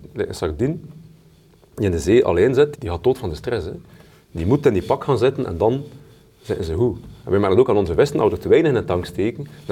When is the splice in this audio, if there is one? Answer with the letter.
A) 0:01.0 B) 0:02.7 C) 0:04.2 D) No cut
B